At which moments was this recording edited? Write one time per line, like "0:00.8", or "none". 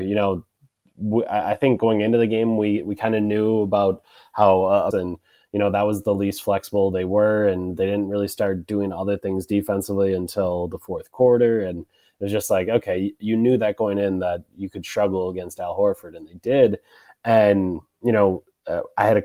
0:04.9